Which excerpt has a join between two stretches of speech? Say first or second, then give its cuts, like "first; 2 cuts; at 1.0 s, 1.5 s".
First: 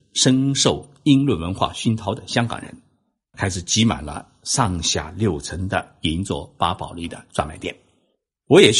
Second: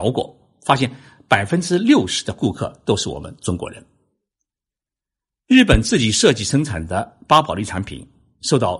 first; 1 cut; at 3.3 s